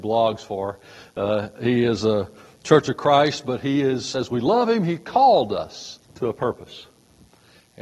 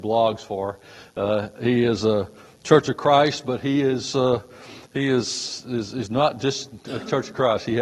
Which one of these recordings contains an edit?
first; 2 cuts; at 4.1 s, 6.0 s

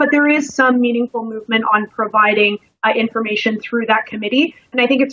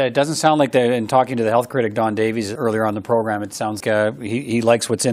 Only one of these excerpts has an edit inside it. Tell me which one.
second; 2 cuts; at 2.6 s, 3.8 s

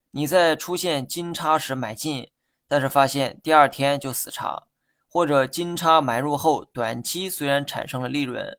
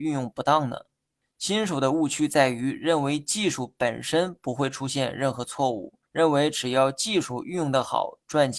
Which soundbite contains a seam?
second; 2 cuts; at 1.2 s, 6.1 s

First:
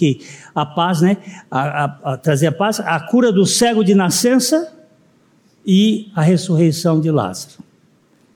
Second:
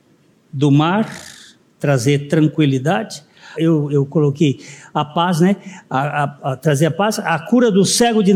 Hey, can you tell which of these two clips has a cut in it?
second; 1 cut; at 3.5 s

